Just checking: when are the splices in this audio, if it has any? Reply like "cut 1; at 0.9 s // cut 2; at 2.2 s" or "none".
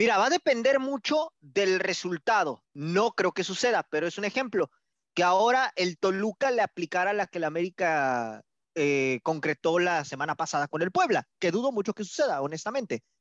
cut 1; at 2.7 s